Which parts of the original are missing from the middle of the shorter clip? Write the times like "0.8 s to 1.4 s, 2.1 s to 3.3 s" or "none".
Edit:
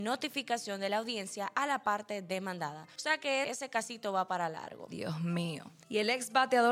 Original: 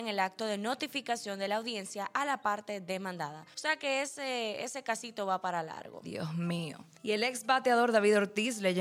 4.0 s to 4.6 s